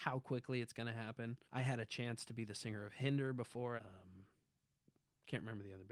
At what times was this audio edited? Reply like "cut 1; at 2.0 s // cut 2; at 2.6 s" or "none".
cut 1; at 1.4 s // cut 2; at 3.8 s